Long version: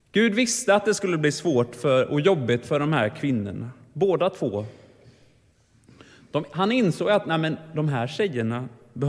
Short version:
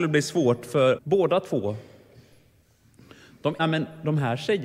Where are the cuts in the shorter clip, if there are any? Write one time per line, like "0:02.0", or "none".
0:01.0
0:03.6

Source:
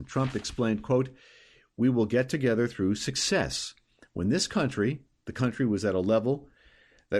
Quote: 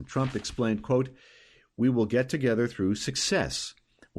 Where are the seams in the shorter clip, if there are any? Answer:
none

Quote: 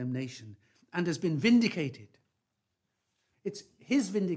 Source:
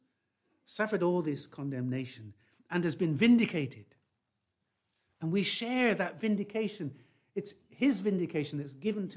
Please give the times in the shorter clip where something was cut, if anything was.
0:03.3

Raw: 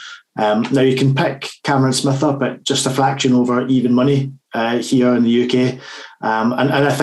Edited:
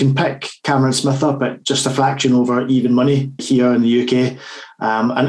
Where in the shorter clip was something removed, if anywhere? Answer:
0:03.4

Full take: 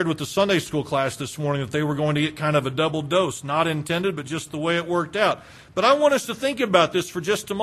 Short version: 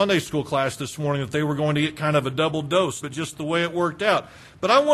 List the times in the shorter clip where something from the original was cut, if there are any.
0:03.0

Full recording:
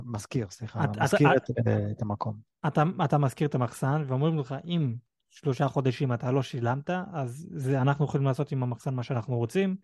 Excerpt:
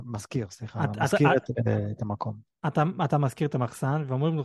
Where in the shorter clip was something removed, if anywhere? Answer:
none

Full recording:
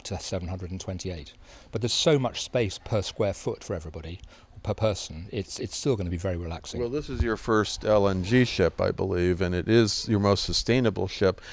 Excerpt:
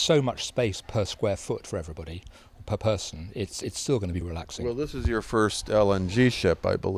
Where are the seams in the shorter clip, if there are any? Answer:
0:04.2

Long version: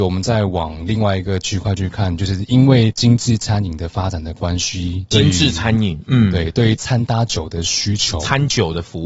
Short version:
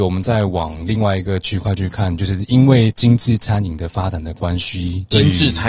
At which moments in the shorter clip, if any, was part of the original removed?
none

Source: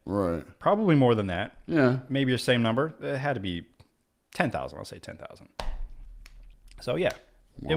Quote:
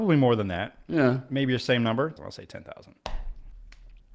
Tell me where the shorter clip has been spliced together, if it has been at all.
0:02.2

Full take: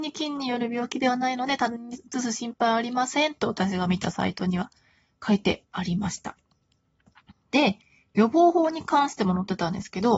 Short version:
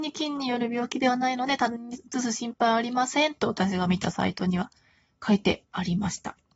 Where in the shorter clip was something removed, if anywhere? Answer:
none

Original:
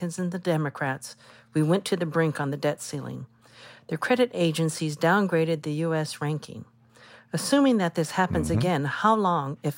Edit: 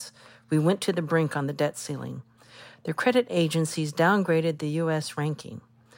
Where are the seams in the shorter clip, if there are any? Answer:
none

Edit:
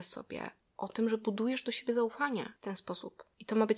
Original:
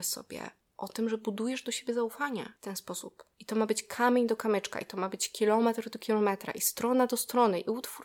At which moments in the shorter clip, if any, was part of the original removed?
none

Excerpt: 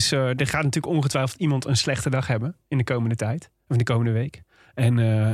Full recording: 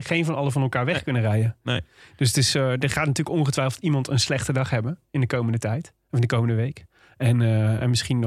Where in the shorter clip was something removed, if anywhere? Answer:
none

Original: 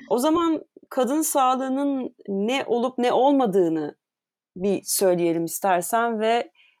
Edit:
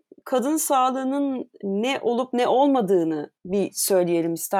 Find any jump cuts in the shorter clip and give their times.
0:03.4

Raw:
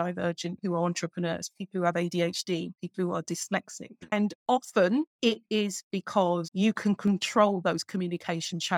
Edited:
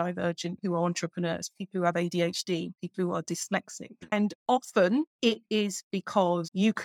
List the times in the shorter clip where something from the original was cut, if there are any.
none

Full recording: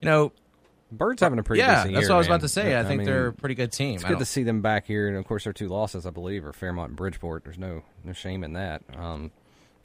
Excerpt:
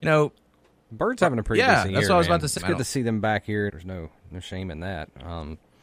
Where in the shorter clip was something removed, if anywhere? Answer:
0:02.6
0:03.7

